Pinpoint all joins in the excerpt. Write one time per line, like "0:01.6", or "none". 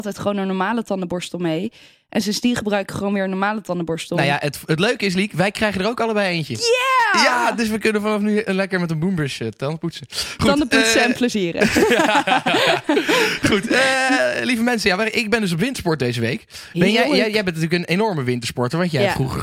none